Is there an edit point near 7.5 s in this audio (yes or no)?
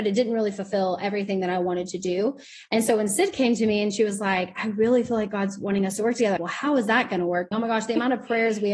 yes